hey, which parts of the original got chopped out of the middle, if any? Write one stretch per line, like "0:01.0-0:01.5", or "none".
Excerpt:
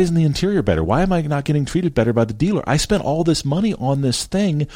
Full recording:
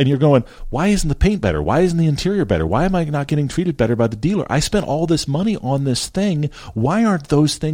none

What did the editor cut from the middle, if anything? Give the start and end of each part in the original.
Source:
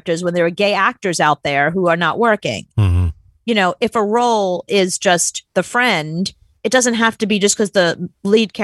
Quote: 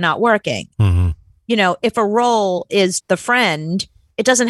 0:05.0-0:05.5

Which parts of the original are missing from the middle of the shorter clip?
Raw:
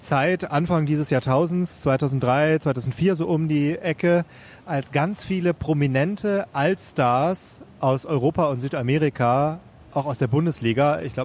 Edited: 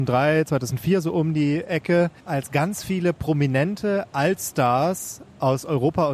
0:04.3-0:04.6

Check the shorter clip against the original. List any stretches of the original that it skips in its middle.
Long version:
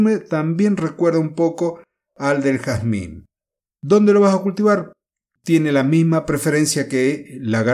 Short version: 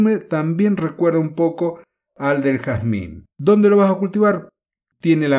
0:03.3-0:03.8

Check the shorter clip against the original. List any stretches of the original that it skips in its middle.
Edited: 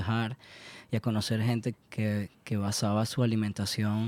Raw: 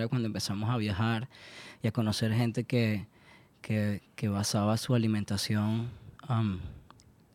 0:02.6-0:03.5

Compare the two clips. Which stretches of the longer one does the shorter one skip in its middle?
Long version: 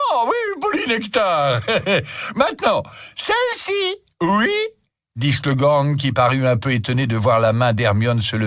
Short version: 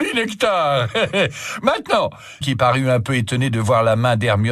0:03.1-0:06.0

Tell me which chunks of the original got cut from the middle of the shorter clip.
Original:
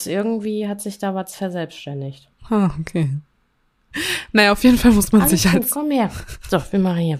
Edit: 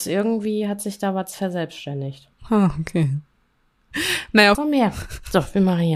0:04.5-0:05.7

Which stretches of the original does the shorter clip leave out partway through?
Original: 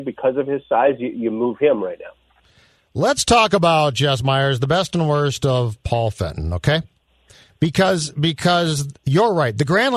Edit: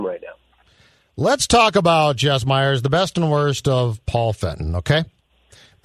none

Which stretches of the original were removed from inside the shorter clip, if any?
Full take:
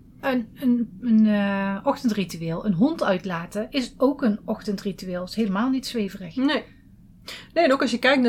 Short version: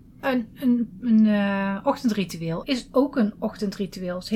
0:02.6-0:03.7

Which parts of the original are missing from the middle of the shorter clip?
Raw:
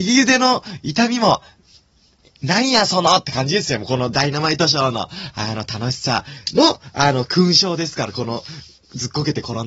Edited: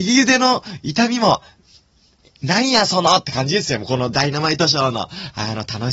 none

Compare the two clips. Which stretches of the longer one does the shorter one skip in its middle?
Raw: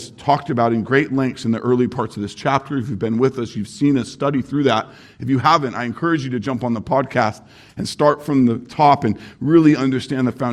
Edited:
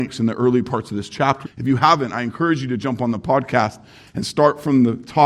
0:02.7-0:05.1

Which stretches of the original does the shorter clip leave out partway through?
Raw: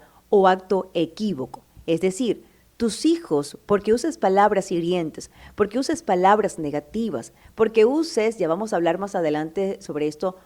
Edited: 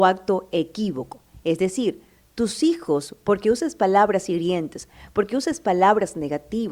none

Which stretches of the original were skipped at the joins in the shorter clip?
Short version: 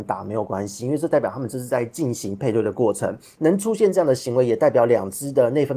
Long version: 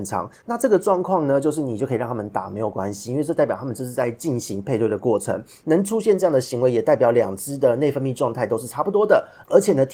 none

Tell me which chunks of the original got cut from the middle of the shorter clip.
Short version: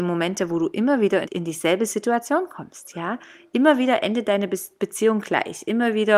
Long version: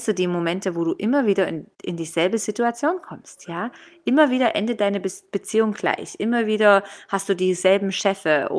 0:01.5-0:01.8

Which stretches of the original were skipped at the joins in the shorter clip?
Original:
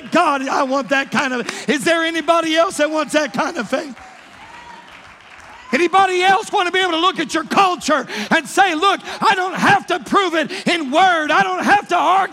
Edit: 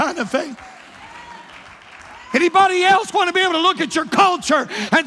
none

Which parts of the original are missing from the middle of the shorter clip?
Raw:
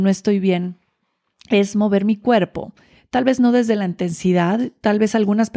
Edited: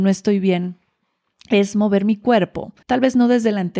0:02.8-0:03.1

